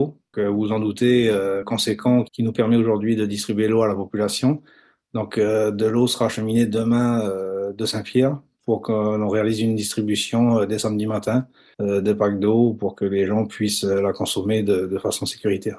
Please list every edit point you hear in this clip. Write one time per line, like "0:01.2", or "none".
0:01.6